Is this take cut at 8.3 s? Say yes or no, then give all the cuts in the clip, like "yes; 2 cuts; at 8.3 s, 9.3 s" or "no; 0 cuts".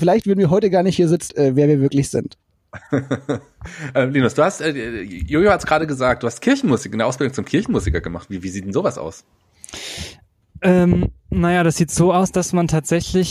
no; 1 cut; at 1.3 s